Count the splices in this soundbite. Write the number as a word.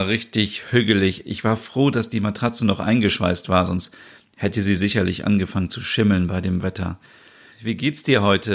one